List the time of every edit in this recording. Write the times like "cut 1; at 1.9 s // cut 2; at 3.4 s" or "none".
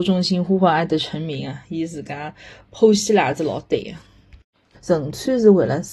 cut 1; at 4.7 s